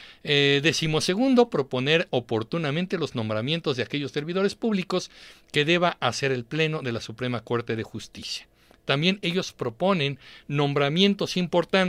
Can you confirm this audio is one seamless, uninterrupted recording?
yes; 0 cuts

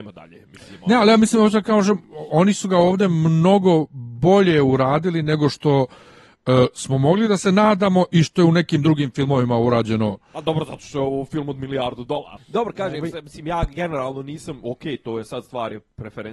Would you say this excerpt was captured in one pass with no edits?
no; 1 cut; at 12.4 s

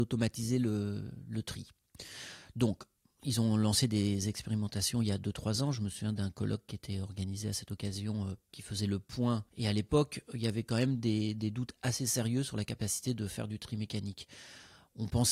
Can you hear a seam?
no; 0 cuts

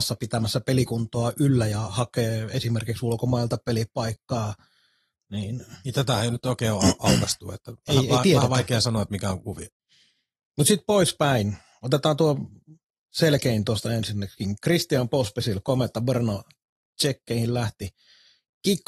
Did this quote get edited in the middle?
no; 0 cuts

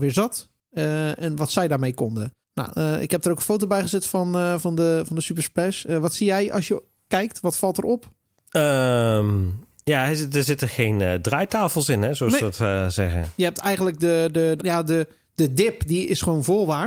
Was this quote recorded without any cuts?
no; 1 cut; at 14.6 s

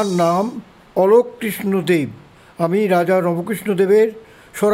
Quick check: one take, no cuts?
yes; 0 cuts

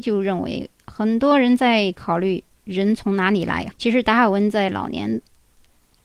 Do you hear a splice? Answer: yes; 1 cut; at 3.7 s

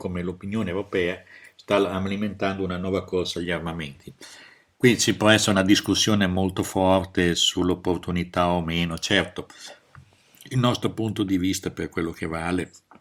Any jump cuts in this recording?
no; 0 cuts

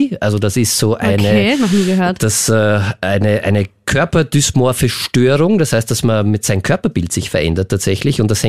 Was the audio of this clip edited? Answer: no; 0 cuts

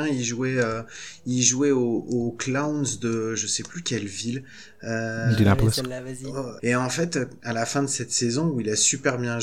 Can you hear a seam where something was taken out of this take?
yes; 1 cut; at 6.6 s

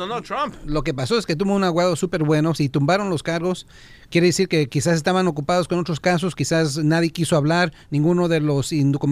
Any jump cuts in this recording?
no; 0 cuts

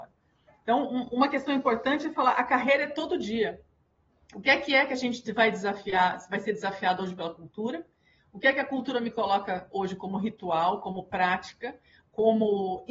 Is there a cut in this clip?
no; 0 cuts

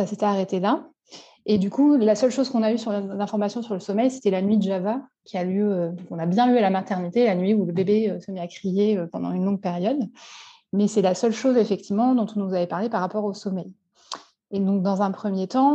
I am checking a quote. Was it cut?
no; 0 cuts

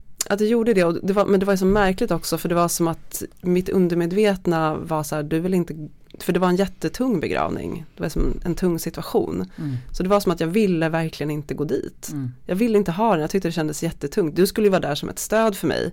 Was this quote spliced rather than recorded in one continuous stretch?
no; 0 cuts

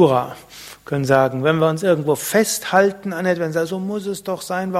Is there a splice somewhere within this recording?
no; 0 cuts

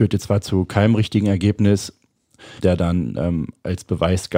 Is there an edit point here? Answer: yes; 1 cut; at 2.6 s

